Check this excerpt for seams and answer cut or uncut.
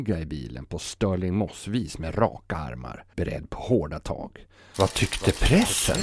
cut